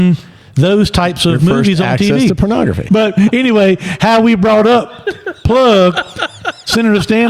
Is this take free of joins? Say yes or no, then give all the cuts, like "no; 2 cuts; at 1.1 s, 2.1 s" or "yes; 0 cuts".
no; 1 cut; at 2.9 s